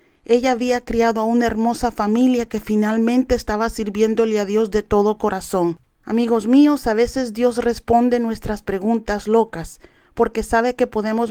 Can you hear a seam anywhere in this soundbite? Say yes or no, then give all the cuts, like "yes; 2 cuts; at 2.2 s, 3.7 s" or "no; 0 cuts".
yes; 1 cut; at 5.9 s